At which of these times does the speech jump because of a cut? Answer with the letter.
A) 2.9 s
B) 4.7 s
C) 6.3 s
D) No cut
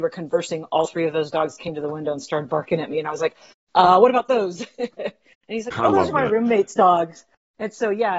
D